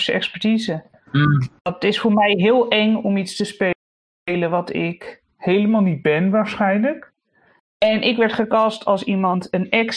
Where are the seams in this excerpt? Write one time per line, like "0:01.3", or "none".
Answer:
0:07.6

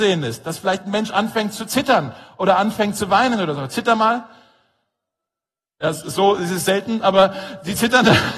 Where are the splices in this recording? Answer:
none

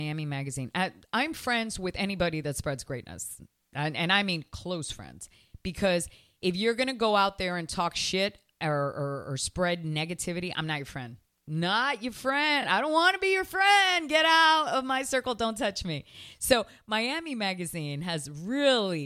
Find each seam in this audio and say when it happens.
none

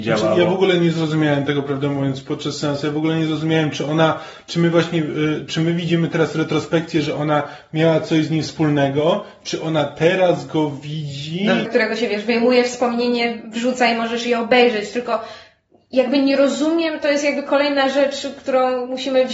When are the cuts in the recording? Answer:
0:11.7

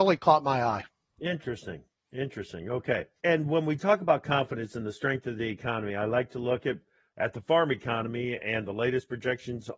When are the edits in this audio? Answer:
0:03.2

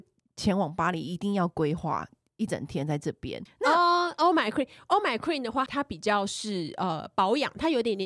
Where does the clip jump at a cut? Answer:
0:03.5
0:05.7

